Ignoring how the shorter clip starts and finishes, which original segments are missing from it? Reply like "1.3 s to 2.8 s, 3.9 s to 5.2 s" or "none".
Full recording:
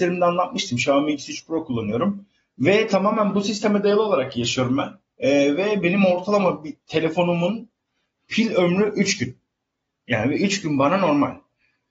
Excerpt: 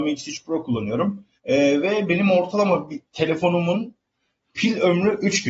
2.4 s to 5.1 s